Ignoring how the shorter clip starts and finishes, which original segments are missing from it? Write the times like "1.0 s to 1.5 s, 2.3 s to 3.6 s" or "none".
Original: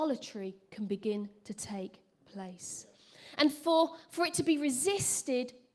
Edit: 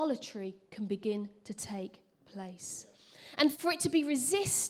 3.5 s to 4.1 s